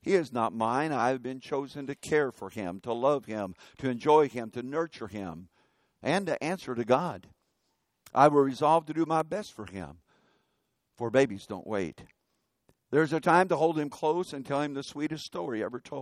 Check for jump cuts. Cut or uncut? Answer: uncut